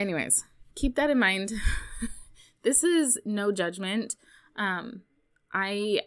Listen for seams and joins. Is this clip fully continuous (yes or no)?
yes